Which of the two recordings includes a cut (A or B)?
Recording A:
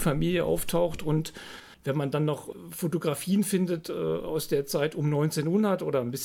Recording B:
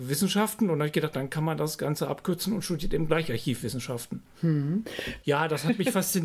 B